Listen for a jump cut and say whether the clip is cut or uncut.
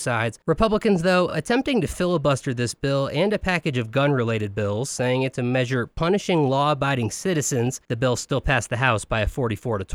uncut